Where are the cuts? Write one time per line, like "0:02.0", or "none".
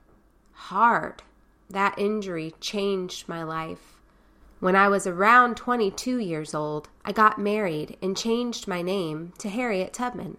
0:01.6
0:04.4
0:07.0